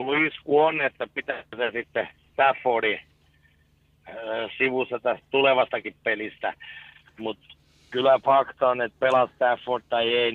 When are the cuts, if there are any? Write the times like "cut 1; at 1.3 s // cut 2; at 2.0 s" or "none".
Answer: cut 1; at 7.1 s